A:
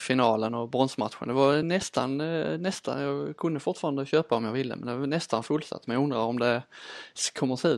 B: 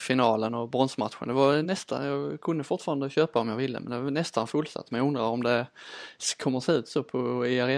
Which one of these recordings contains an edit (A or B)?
B